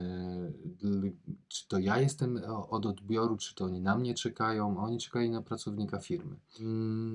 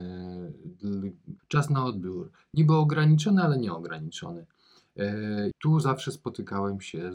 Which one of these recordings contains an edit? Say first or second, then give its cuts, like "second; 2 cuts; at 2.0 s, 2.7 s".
second; 2 cuts; at 1.4 s, 5.5 s